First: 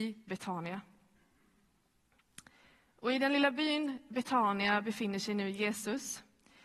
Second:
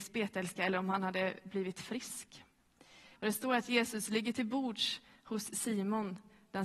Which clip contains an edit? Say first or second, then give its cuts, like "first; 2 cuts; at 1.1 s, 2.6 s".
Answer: second; 1 cut; at 3.2 s